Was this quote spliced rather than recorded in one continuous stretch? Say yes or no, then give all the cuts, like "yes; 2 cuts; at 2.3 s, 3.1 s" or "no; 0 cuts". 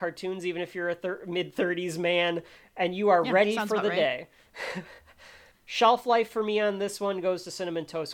no; 0 cuts